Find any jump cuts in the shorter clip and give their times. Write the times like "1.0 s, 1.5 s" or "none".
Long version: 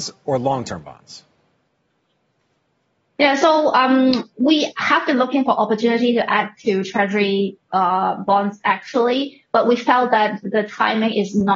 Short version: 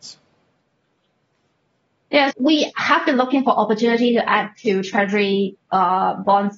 2.3 s